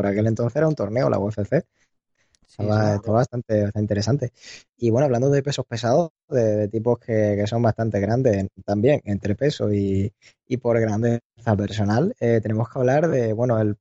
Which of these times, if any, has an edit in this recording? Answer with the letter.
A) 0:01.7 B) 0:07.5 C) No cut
C